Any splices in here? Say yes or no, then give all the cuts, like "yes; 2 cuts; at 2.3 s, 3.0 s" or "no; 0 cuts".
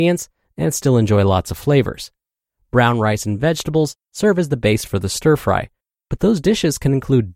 no; 0 cuts